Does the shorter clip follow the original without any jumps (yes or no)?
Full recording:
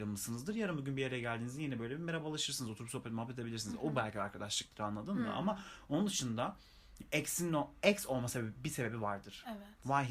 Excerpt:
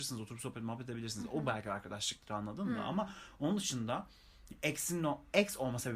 yes